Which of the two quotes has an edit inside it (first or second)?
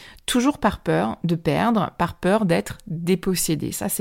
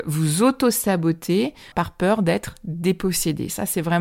second